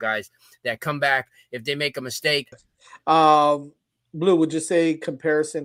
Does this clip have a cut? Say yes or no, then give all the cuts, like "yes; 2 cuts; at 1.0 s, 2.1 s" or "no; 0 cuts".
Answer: yes; 1 cut; at 2.5 s